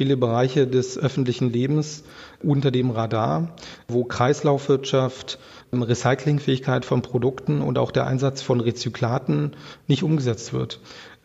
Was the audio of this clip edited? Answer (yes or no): yes